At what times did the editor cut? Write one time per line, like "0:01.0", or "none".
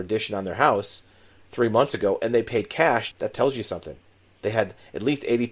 0:03.1